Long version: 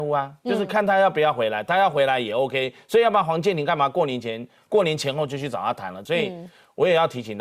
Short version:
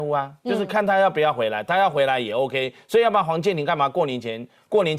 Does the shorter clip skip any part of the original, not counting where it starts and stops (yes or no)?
no